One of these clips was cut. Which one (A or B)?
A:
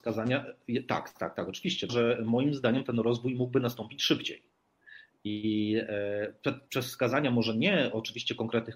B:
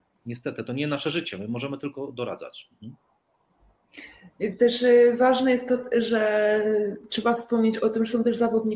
A